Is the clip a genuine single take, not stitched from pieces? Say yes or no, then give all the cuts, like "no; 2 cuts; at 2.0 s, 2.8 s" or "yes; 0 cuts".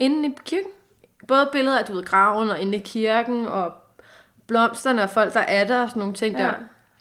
yes; 0 cuts